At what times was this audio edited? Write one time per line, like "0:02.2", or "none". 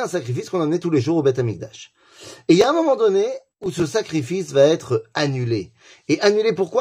none